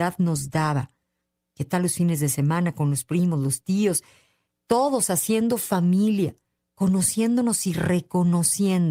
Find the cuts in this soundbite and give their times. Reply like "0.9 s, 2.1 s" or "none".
none